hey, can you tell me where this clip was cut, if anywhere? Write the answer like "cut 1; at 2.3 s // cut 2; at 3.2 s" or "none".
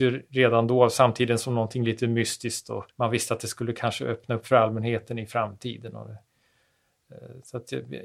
cut 1; at 2.9 s